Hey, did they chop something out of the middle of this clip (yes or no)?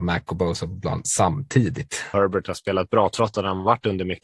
yes